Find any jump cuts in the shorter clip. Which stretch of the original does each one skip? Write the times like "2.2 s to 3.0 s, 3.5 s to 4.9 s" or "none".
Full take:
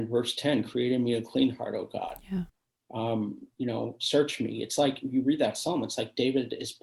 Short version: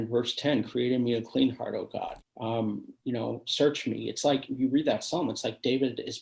2.2 s to 2.7 s